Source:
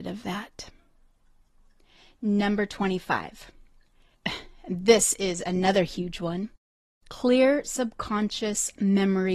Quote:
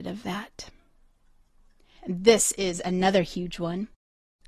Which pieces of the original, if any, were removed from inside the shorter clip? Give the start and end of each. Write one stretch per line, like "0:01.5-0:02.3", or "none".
0:02.0-0:04.6